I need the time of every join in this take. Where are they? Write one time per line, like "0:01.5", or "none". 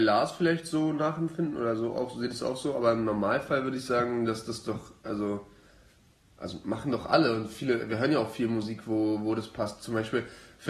none